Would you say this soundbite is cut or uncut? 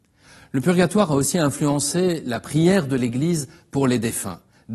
uncut